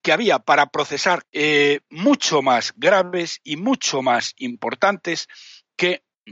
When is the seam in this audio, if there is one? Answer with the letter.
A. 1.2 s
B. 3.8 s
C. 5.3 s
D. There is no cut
A